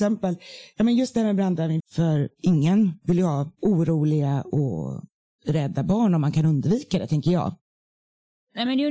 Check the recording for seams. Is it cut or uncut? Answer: cut